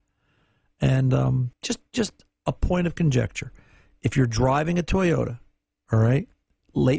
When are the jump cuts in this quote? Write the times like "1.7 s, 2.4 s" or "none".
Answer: 1.5 s